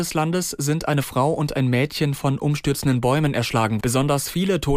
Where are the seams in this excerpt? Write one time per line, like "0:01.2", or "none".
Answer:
0:03.8